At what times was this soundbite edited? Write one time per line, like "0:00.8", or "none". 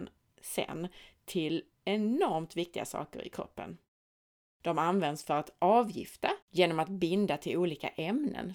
0:06.4